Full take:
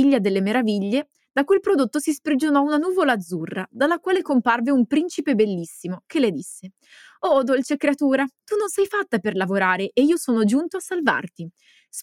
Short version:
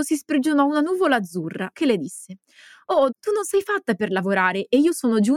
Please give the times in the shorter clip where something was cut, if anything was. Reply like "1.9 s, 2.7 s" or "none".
1.7 s, 3.1 s